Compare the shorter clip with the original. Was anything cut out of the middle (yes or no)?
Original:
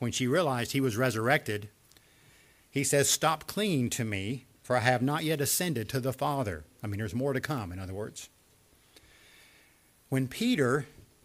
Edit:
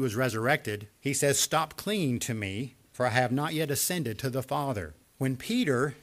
yes